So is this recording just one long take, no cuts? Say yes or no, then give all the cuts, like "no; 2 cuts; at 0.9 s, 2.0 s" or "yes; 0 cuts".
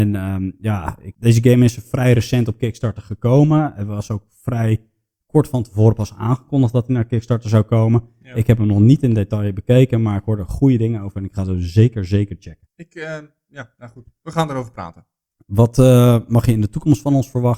yes; 0 cuts